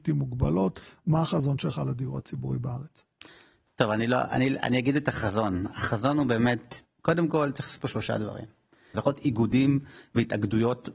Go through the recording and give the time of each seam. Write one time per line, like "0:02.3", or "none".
0:06.8
0:08.9